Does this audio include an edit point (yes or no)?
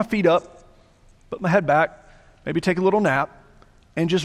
no